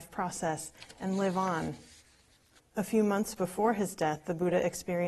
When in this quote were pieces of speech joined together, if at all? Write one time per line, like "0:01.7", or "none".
0:02.6